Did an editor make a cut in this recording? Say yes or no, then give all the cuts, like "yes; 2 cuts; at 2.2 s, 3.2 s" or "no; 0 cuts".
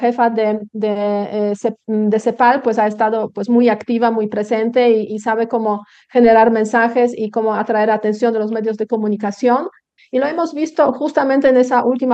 yes; 1 cut; at 10.0 s